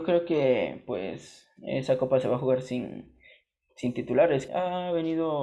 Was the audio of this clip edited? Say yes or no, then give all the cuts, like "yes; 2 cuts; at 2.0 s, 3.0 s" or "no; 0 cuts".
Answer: yes; 1 cut; at 4.5 s